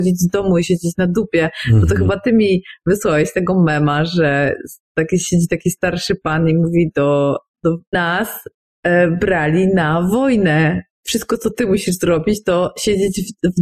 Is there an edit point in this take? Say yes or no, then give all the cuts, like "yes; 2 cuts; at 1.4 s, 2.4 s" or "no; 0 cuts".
yes; 1 cut; at 7.9 s